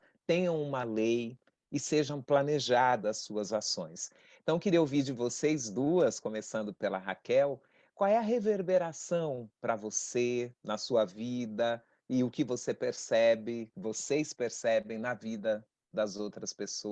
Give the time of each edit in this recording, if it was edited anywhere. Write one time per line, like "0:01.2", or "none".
none